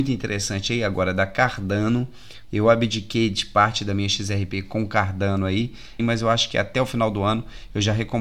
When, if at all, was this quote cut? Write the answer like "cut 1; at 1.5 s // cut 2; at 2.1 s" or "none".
cut 1; at 2.4 s // cut 2; at 6.0 s